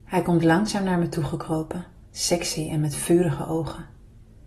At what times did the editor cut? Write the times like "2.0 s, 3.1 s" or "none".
2.0 s